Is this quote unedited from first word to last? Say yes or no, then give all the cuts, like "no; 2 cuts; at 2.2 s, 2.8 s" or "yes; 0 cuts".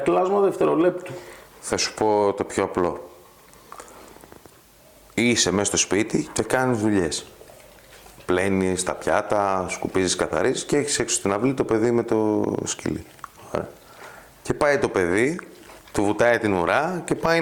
no; 1 cut; at 15.8 s